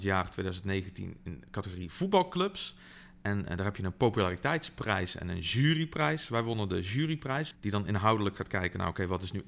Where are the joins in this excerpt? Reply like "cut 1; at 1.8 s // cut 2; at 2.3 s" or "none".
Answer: cut 1; at 7.5 s